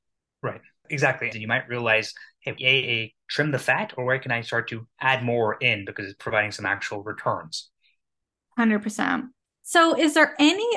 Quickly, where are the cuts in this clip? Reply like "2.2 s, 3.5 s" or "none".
1.3 s, 2.6 s